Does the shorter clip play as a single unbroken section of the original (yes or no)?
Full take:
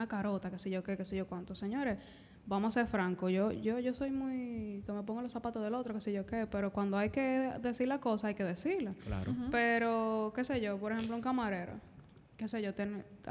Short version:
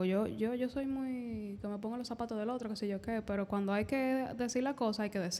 yes